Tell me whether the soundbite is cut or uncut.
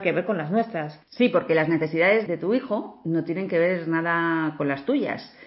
cut